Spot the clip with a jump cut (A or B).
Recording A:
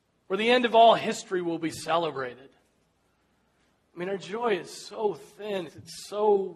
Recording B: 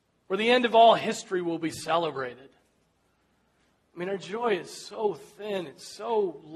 A